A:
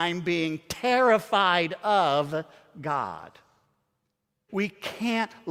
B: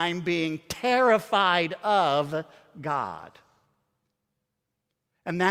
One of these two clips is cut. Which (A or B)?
A